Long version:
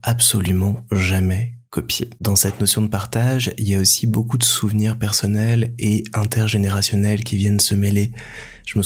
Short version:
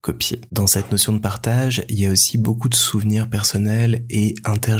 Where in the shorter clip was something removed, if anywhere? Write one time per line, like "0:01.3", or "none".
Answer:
none